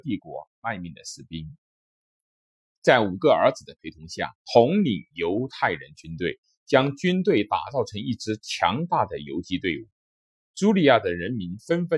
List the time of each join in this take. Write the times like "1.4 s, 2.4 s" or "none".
4.4 s